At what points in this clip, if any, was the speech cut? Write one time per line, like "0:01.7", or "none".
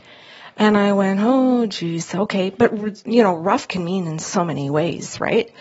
none